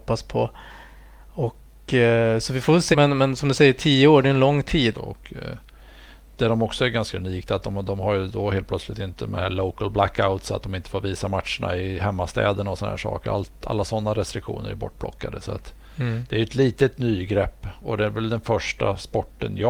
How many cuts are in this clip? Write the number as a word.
two